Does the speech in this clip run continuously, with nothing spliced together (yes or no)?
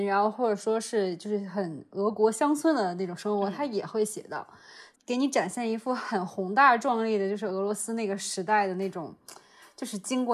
no